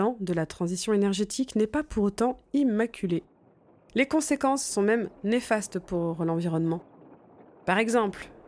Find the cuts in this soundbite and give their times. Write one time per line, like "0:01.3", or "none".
none